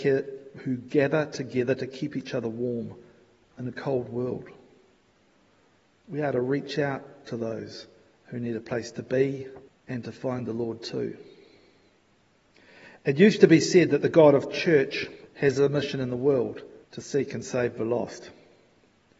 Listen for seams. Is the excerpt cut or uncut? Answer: cut